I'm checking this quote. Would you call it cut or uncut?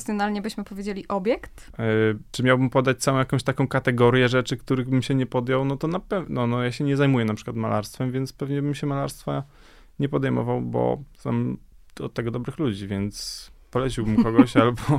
cut